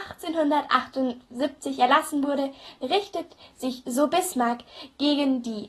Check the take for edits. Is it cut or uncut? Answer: uncut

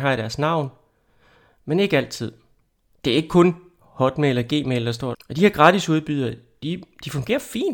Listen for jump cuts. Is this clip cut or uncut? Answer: cut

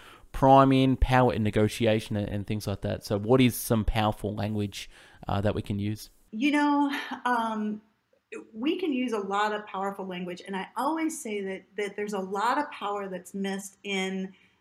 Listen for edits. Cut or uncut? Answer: uncut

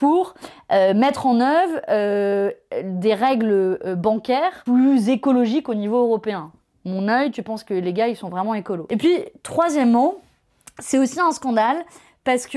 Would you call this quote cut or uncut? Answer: uncut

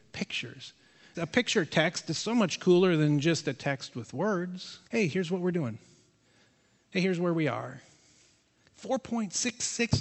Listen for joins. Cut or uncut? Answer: cut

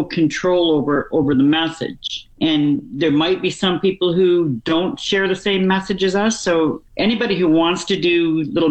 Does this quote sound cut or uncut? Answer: cut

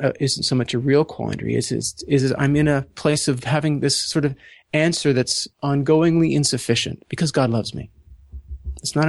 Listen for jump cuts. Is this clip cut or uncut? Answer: cut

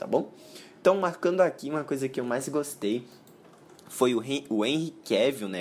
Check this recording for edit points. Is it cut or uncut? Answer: uncut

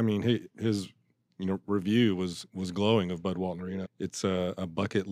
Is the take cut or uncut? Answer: cut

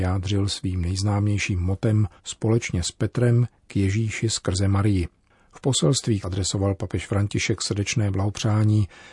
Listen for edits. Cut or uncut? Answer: cut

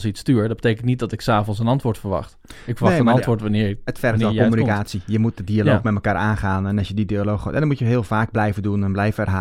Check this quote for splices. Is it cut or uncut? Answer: uncut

